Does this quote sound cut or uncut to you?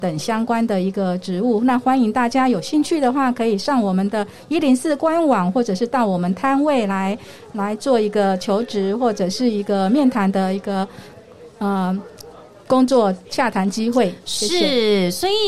uncut